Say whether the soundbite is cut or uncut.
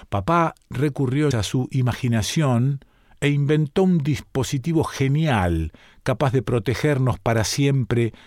cut